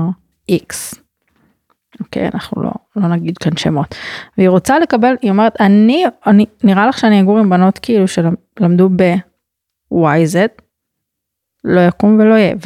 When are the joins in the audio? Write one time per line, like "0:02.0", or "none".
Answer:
none